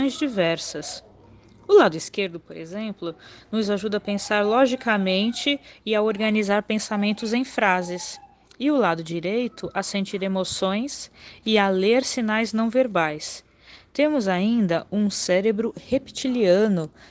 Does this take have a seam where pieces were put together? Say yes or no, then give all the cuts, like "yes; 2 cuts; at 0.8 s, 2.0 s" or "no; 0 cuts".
no; 0 cuts